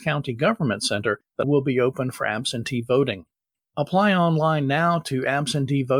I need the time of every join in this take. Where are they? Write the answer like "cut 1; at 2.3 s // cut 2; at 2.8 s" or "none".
cut 1; at 1.4 s